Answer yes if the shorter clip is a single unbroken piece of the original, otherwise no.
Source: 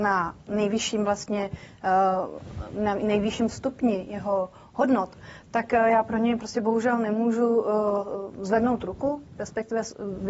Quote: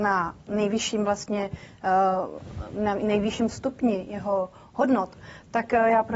yes